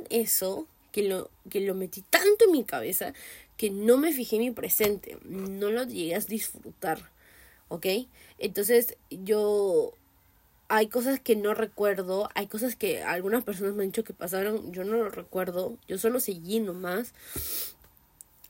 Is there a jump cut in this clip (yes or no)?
no